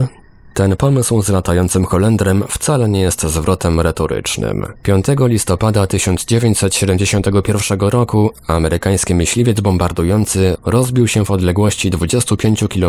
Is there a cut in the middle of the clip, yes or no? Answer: yes